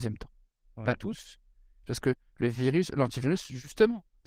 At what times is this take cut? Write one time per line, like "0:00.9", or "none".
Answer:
0:01.8